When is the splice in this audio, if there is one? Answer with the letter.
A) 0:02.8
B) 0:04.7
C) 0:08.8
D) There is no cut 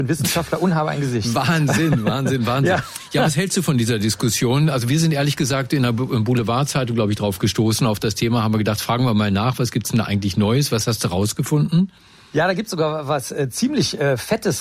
D